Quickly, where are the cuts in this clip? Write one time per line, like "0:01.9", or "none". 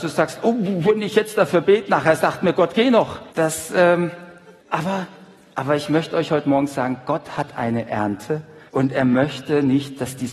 0:03.3
0:04.6
0:08.7